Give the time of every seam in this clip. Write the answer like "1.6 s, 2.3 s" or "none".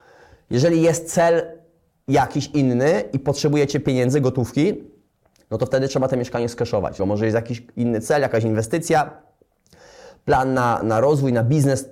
7.0 s, 10.8 s

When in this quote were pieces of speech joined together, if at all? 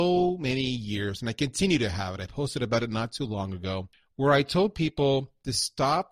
none

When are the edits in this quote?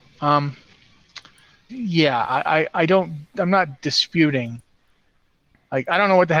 1.7 s

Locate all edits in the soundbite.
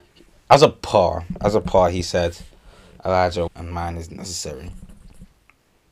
3.5 s

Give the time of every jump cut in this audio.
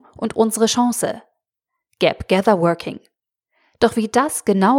none

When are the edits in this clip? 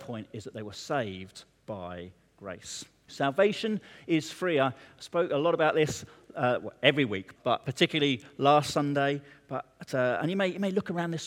3.1 s, 7.4 s

